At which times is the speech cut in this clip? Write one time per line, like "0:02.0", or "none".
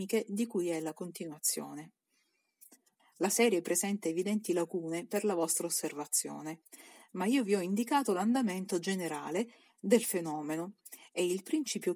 0:03.0

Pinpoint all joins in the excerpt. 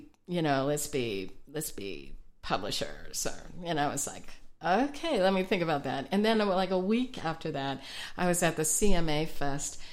none

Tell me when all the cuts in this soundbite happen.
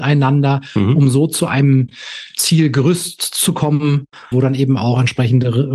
0:04.3

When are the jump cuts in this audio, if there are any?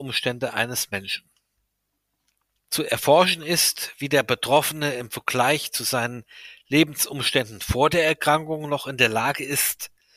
none

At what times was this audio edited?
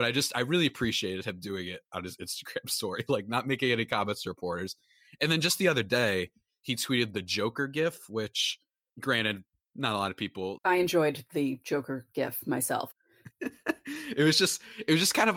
0:10.6
0:12.9

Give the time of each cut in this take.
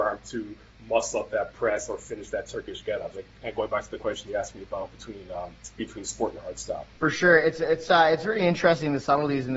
0:03.1
0:06.9

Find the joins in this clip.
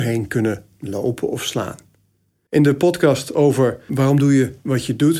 0:02.5
0:03.9

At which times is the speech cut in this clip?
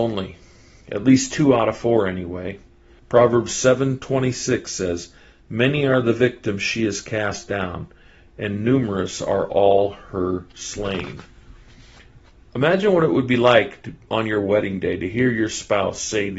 0:03.0

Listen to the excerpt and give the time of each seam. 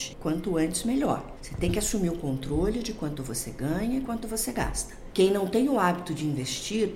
none

